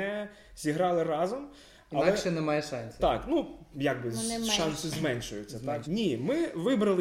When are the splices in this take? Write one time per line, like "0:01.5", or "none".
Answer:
0:03.7
0:05.8